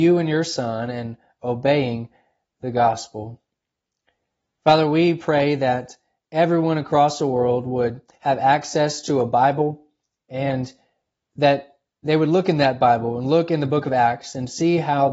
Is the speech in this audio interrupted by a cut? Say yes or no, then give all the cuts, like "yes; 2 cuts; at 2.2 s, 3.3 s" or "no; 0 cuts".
no; 0 cuts